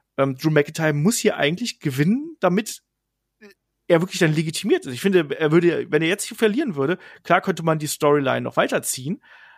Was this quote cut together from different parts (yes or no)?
no